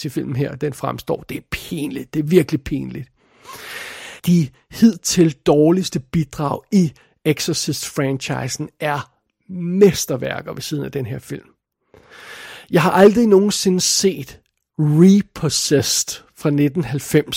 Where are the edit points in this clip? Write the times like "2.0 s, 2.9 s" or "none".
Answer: 4.2 s